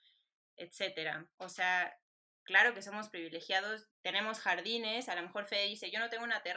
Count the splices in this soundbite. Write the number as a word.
two